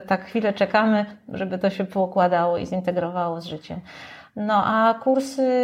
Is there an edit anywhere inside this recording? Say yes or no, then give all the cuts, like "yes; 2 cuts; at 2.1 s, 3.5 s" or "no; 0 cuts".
no; 0 cuts